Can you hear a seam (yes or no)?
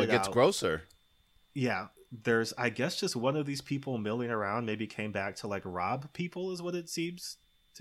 yes